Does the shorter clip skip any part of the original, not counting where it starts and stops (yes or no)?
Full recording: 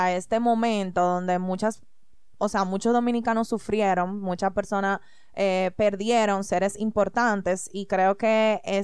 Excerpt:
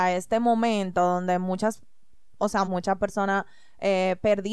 yes